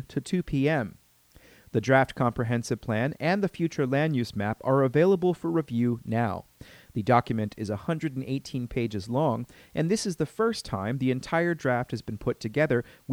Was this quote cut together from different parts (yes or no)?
no